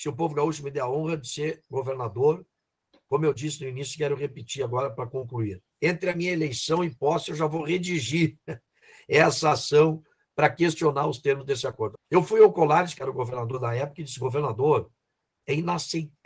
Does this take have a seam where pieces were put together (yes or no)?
yes